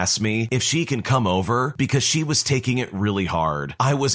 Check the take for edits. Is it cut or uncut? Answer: uncut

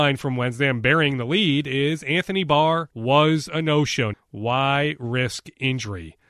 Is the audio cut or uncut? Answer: cut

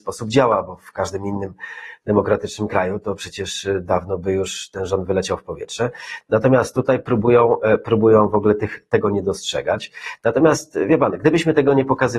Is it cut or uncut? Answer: uncut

